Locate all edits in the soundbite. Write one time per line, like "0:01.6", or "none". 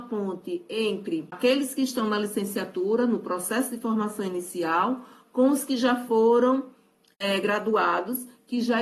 none